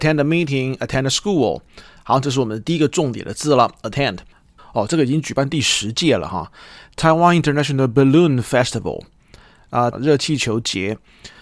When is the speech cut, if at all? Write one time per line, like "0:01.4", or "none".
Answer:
0:04.6
0:09.9